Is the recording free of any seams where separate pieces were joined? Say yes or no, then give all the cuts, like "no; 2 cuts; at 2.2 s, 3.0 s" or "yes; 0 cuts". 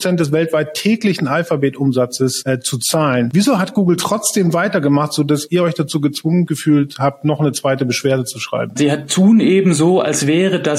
no; 1 cut; at 8.8 s